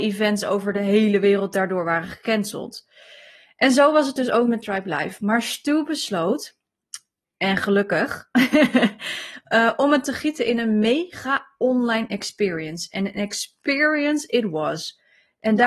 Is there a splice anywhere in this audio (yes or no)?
yes